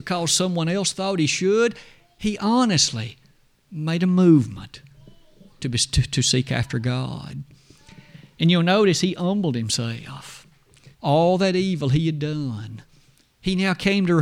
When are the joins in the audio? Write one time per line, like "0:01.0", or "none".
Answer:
0:10.9